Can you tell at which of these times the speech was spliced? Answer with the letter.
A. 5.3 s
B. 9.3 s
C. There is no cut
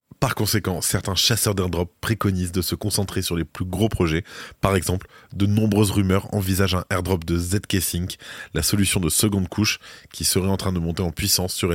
C